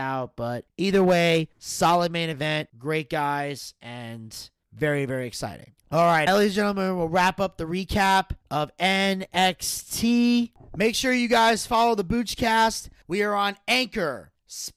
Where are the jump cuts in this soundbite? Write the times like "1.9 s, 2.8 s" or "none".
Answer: 6.3 s